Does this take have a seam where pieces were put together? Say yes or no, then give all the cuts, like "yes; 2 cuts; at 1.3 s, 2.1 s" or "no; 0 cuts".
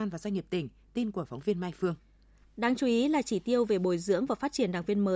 yes; 1 cut; at 2.4 s